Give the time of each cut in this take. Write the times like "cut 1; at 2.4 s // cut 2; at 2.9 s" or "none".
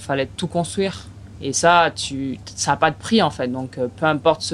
cut 1; at 1.4 s